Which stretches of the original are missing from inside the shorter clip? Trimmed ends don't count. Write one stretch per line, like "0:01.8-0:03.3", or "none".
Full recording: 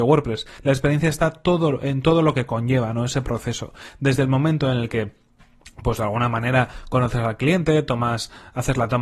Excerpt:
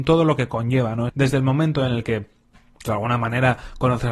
0:03.1-0:03.9
0:05.7-0:06.0

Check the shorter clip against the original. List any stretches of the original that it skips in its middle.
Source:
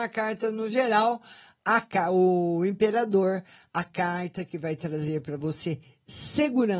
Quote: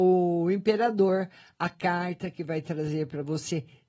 none

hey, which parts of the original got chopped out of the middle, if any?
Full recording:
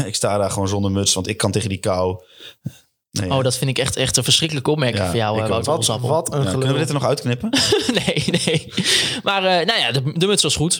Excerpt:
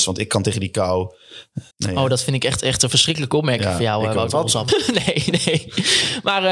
0:02.8-0:03.0
0:06.0-0:07.7

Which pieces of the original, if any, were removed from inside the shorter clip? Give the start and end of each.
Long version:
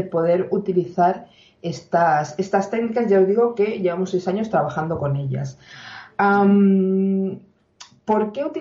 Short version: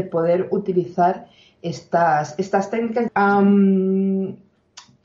0:03.1-0:06.1

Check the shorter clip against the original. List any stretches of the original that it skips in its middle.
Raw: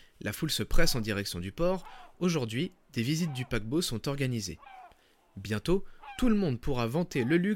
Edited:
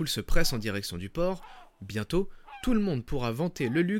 0:02.1-0:05.2

